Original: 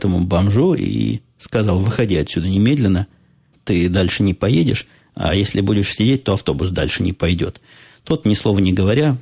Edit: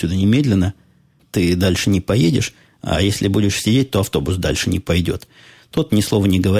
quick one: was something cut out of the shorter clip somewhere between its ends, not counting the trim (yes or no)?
no